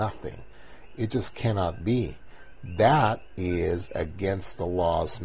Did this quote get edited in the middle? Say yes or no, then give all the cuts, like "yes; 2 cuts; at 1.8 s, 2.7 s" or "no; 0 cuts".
no; 0 cuts